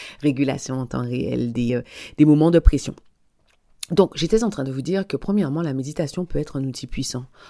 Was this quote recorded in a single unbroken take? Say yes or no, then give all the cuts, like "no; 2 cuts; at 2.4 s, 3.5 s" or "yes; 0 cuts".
yes; 0 cuts